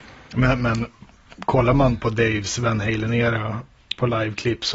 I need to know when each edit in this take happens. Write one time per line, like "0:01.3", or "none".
0:02.0